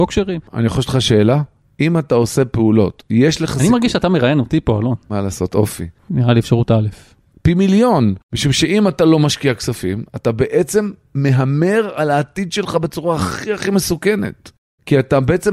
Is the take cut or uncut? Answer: cut